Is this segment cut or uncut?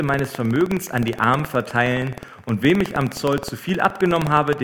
uncut